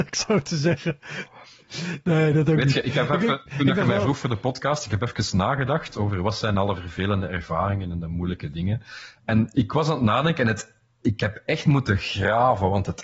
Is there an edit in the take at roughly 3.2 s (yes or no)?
no